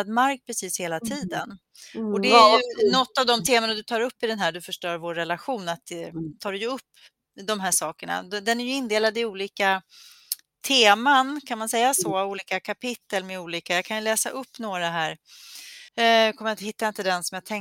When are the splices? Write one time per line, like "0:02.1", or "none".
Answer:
0:15.9